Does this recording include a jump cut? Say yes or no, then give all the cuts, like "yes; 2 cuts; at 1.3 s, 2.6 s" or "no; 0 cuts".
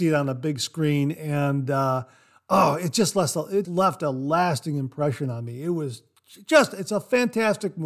yes; 1 cut; at 3.6 s